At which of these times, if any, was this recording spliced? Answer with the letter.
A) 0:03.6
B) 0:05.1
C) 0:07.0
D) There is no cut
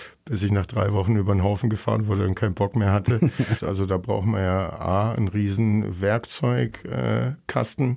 A